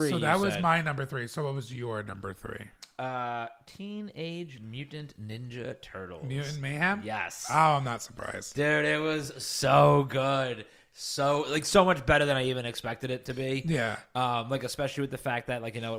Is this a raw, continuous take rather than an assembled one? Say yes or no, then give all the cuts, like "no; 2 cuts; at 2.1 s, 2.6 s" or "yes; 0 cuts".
yes; 0 cuts